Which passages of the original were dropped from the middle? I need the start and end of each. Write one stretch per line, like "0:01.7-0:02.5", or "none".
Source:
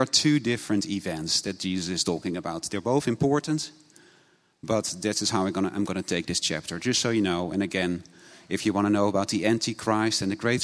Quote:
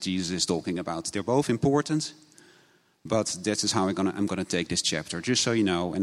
none

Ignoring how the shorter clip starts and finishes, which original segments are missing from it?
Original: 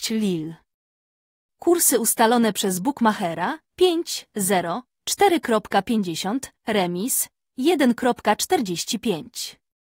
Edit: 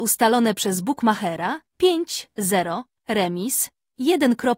0:05.0-0:06.6

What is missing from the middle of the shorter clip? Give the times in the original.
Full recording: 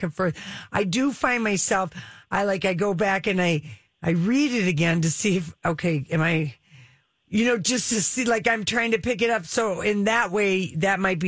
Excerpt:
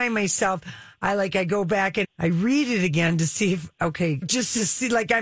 0:03.3-0:03.9
0:06.1-0:07.6

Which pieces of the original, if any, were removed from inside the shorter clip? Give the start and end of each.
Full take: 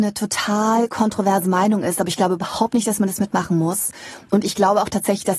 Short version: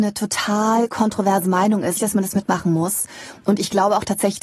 0:02.0-0:02.8

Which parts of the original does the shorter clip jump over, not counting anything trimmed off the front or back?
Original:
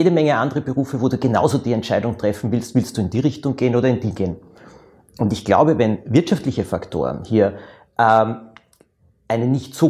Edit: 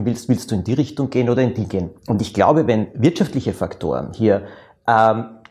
0:04.4-0:05.1

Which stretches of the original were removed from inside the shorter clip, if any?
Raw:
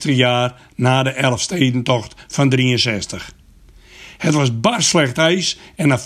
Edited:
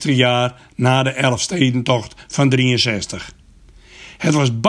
none

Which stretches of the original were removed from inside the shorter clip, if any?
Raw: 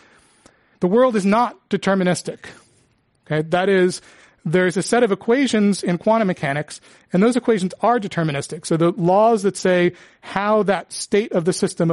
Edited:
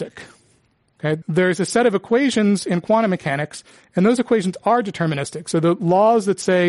0:03.5-0:04.4

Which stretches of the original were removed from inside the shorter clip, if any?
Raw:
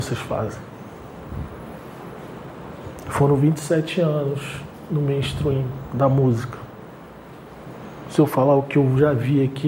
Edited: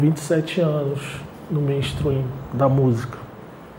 none

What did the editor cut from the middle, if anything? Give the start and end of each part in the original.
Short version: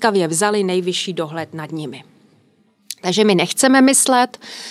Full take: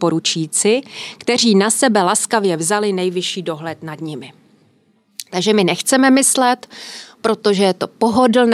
none

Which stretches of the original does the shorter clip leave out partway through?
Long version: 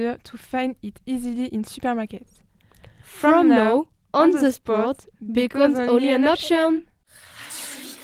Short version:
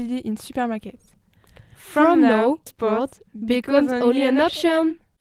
0:03.9-0:04.5

